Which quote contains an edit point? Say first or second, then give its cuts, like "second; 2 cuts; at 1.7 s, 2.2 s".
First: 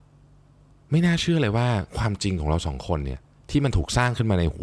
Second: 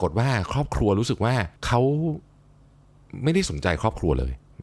second; 1 cut; at 1.6 s